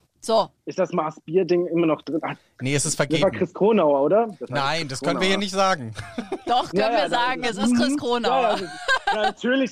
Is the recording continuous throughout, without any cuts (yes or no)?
yes